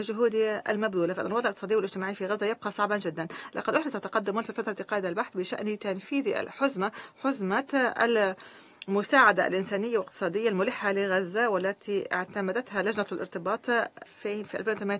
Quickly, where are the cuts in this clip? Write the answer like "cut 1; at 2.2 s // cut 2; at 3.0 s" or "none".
cut 1; at 14.1 s